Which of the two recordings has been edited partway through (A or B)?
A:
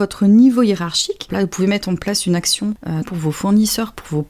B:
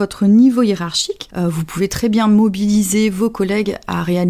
A